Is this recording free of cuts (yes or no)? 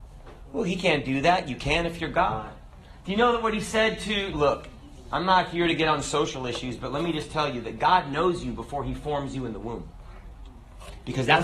no